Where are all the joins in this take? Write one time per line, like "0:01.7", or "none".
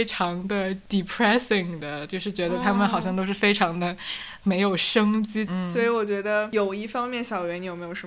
0:05.5